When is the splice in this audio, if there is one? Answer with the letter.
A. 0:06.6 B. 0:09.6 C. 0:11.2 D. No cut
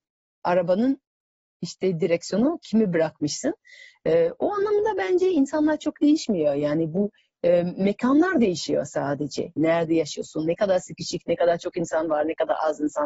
B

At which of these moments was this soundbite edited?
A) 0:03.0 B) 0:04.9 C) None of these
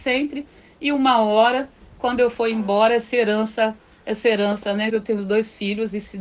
B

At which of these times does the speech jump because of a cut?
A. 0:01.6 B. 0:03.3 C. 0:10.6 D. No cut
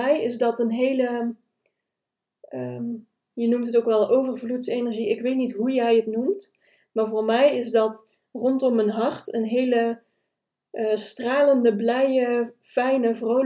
B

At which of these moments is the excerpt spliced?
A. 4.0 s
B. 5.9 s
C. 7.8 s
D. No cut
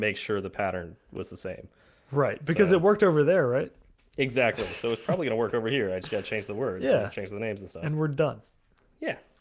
D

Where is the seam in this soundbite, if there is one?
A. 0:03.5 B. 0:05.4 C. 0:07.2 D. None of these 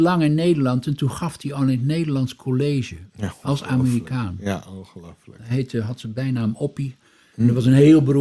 D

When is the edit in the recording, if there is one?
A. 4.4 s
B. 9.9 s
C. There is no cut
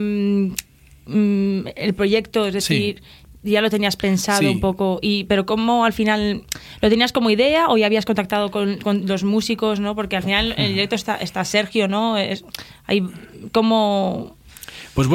C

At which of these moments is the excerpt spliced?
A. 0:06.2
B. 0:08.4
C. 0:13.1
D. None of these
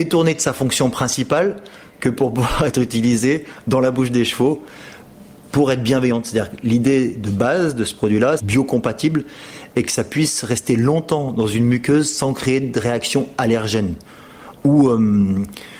B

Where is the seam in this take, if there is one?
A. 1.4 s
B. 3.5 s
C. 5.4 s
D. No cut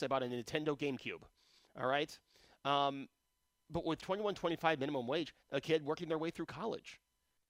C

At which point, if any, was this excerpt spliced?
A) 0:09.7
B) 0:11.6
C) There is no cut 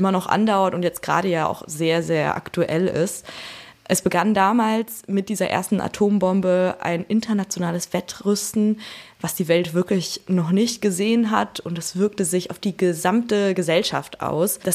C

